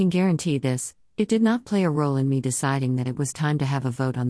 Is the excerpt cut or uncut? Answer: uncut